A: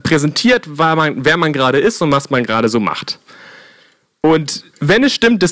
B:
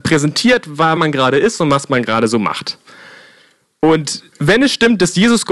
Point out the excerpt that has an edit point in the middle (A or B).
B